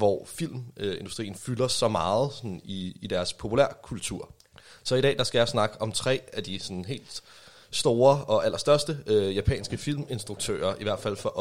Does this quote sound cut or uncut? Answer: uncut